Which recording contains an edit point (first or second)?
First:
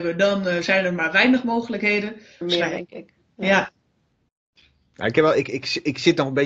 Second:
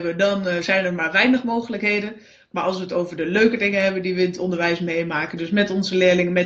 first